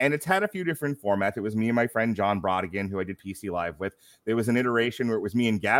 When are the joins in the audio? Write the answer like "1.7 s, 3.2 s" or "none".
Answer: none